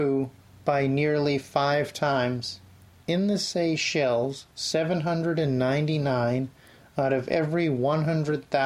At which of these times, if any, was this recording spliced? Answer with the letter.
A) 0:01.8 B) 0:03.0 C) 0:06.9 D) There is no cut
B